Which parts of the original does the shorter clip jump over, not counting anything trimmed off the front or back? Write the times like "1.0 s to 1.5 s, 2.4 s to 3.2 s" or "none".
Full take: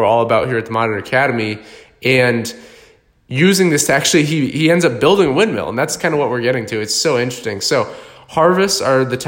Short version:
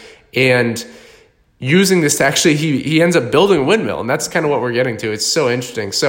none